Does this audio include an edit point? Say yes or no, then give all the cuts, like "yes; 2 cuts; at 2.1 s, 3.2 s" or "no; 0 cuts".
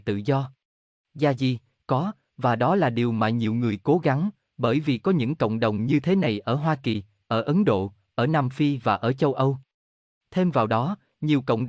yes; 1 cut; at 1.0 s